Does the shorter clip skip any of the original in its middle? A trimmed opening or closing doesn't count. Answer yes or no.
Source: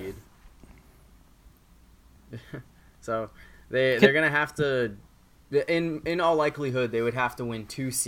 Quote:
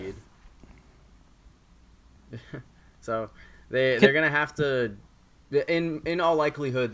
no